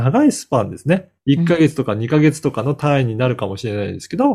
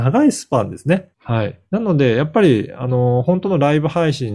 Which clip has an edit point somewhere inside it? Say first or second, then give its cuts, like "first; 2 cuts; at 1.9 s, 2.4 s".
second; 1 cut; at 1.1 s